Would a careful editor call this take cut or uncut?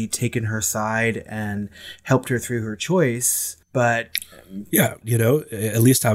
cut